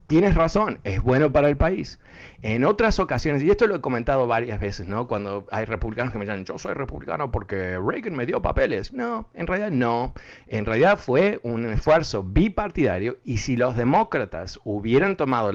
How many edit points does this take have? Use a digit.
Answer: 0